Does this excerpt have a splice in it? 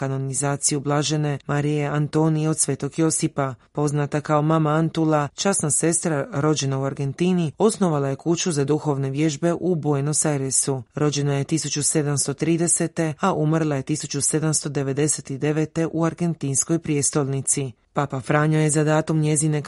no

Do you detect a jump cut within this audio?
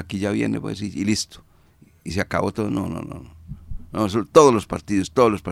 no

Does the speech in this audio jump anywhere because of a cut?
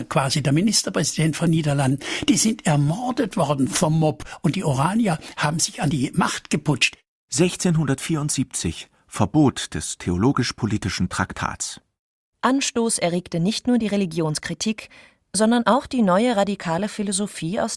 no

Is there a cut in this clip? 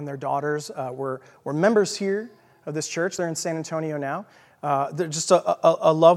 no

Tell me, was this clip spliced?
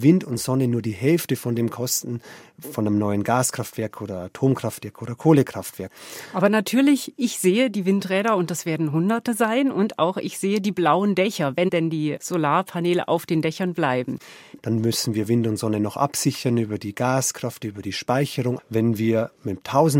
yes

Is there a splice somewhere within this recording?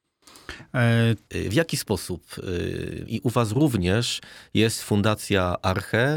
yes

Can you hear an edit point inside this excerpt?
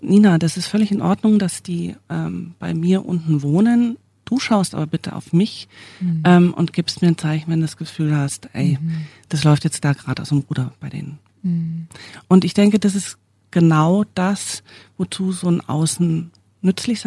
no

